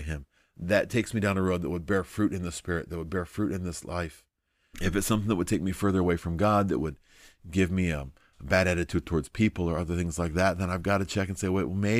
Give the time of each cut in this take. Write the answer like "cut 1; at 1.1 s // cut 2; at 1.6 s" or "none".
cut 1; at 4.7 s